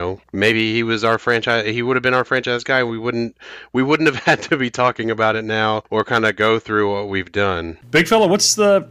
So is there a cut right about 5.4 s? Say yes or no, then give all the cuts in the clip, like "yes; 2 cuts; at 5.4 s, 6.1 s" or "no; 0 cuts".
no; 0 cuts